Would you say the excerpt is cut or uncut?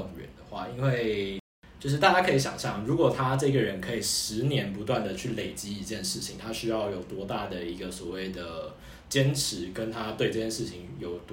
cut